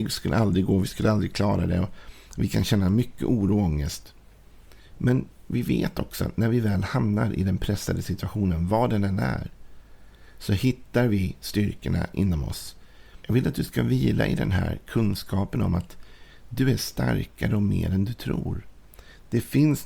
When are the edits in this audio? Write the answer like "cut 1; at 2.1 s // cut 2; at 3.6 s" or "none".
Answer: cut 1; at 13.2 s